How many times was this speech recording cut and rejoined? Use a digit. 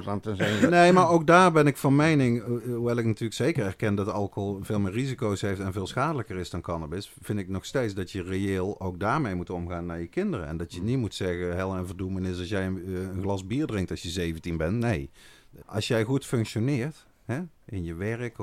1